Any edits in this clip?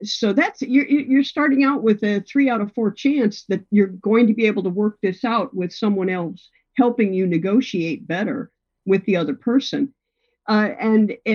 no; 0 cuts

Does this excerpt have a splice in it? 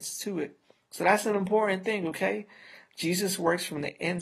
no; 0 cuts

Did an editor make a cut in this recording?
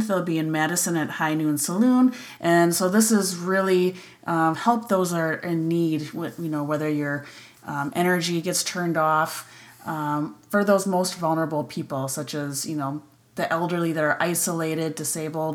yes; 2 cuts; at 2.4 s, 4.5 s

